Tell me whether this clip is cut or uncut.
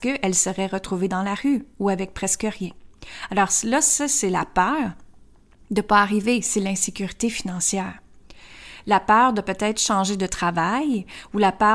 uncut